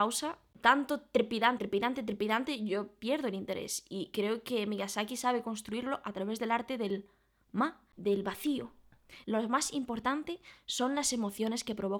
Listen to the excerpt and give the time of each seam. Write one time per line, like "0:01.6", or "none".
0:01.6
0:09.2